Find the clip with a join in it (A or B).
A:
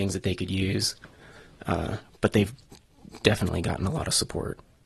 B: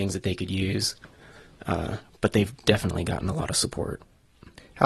B